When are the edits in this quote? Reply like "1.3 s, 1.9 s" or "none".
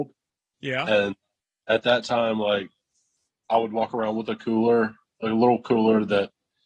none